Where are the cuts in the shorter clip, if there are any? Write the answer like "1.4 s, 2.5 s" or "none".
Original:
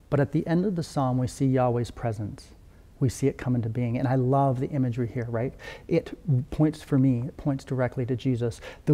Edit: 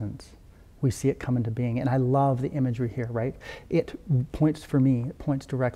none